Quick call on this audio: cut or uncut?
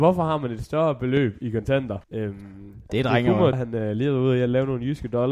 cut